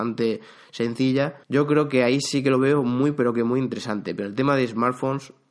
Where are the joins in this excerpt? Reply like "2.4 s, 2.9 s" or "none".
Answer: 1.4 s